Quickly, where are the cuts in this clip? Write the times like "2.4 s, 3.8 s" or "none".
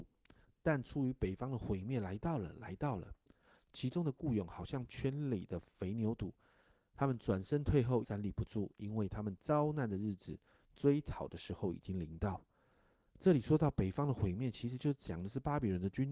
8.0 s